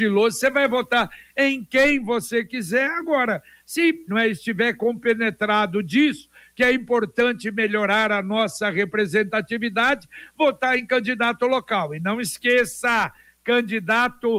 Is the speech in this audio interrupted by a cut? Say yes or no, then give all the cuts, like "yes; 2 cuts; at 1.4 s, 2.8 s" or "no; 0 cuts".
yes; 1 cut; at 4.1 s